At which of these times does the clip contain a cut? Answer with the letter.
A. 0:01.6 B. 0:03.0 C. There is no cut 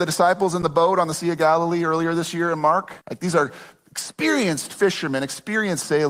B